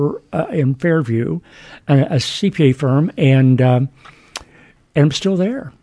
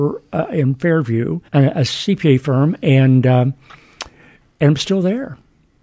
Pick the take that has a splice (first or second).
second